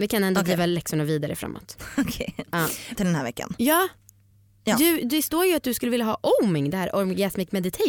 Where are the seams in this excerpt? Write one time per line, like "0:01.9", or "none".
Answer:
0:02.9